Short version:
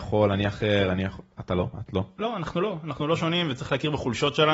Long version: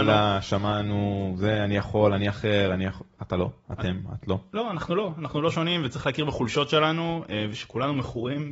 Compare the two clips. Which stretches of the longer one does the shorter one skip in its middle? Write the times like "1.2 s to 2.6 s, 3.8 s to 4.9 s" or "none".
3.6 s to 4.1 s